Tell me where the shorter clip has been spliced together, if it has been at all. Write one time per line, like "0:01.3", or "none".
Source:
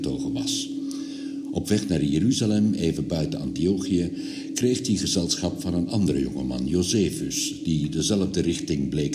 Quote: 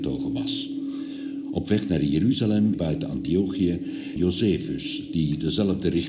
0:02.7
0:04.2